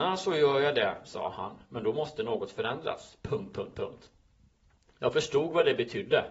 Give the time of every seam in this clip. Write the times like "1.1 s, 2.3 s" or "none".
none